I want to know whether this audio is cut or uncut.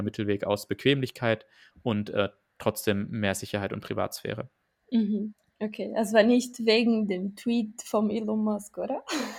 uncut